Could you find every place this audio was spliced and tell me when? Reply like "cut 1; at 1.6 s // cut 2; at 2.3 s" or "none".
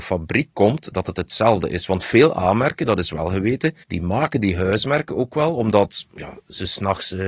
cut 1; at 3.8 s